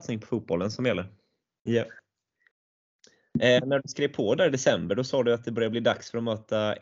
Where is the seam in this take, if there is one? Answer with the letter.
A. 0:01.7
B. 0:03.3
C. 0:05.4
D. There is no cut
A